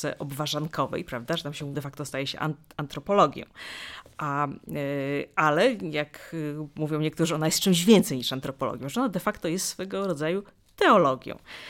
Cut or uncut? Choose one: cut